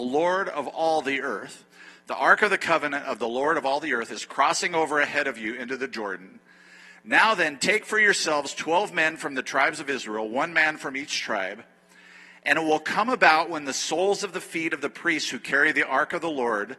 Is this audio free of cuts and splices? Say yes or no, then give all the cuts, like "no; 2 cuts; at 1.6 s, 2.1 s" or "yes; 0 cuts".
yes; 0 cuts